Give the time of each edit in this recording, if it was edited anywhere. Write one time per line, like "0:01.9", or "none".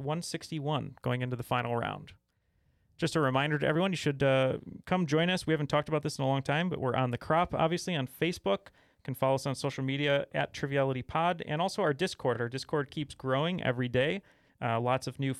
none